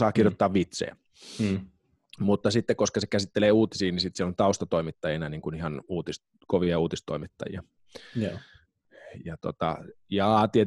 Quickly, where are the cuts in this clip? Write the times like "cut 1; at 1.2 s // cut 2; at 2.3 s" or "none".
none